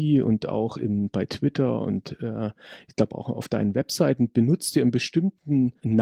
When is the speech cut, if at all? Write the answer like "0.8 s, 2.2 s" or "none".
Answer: none